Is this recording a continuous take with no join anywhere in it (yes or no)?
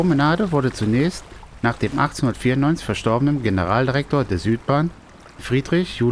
yes